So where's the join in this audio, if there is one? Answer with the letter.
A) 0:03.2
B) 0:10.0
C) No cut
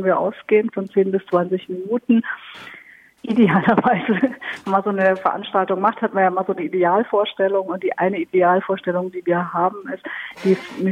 A